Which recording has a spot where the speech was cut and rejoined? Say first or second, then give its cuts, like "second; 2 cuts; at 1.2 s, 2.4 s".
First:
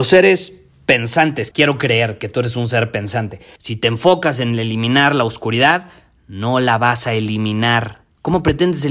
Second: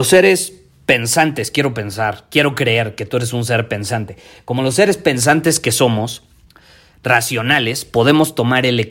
first; 2 cuts; at 1.5 s, 3.6 s